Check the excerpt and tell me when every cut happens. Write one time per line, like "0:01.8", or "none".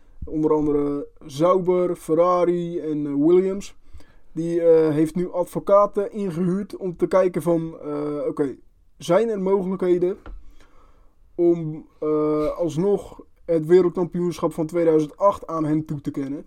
none